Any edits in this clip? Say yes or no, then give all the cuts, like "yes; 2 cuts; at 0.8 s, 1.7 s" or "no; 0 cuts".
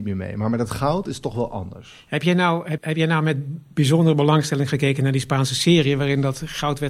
yes; 1 cut; at 2.8 s